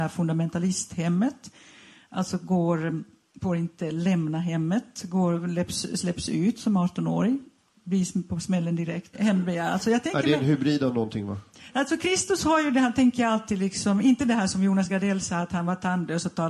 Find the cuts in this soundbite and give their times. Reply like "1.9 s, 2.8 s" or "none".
9.1 s